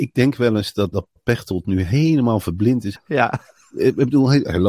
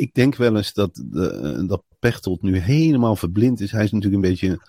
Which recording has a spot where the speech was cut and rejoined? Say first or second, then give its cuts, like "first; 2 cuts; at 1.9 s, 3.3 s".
first; 2 cuts; at 0.9 s, 3.0 s